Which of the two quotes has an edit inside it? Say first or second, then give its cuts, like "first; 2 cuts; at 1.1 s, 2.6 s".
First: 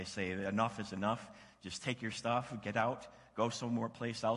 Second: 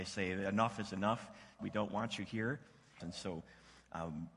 second; 2 cuts; at 1.6 s, 3.0 s